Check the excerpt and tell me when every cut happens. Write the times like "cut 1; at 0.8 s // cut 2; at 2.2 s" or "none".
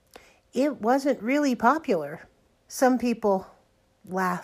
cut 1; at 2.5 s